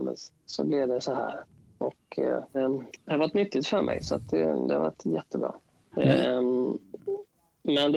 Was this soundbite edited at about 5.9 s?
yes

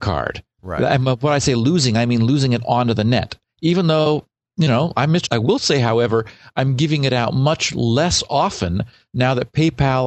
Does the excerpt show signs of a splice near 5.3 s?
yes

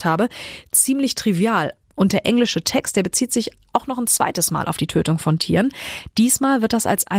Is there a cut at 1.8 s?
yes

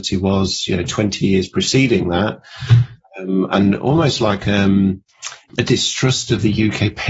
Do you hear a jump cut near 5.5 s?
yes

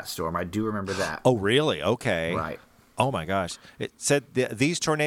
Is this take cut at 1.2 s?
no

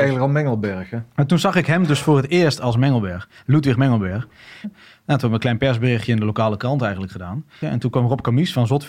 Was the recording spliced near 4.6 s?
yes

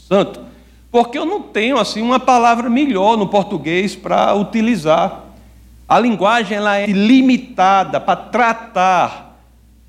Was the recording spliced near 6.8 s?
yes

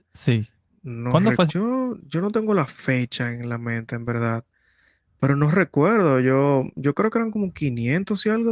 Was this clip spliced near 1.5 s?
yes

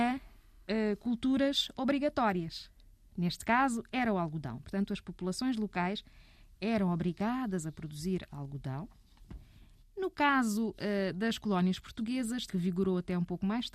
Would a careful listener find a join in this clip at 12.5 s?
yes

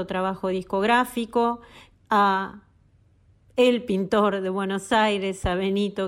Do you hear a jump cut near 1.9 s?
yes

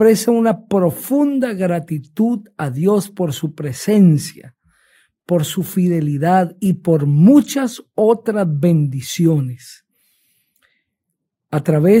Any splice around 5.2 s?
yes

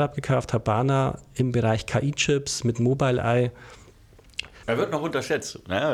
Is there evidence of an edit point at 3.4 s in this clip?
no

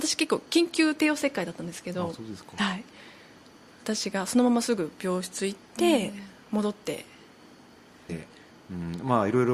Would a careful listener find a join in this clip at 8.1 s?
yes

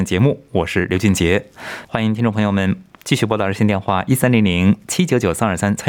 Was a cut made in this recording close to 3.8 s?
no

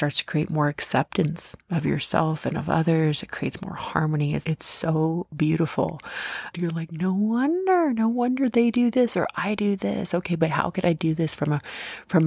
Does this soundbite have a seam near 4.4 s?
yes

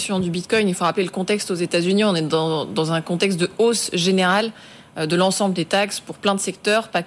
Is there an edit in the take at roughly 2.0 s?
no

